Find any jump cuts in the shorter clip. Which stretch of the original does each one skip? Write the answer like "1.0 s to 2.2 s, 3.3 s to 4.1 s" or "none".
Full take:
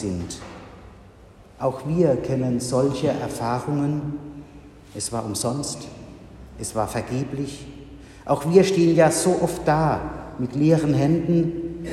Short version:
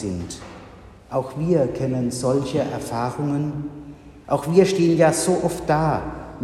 1.0 s to 1.5 s, 4.7 s to 8.2 s